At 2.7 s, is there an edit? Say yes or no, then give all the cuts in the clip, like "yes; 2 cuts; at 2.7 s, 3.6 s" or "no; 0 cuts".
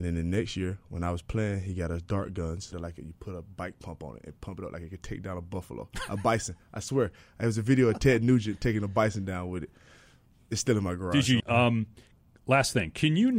yes; 2 cuts; at 2.7 s, 11.4 s